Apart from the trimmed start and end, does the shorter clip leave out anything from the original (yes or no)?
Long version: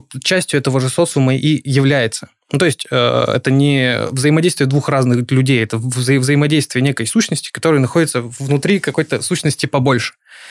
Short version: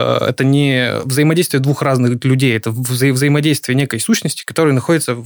no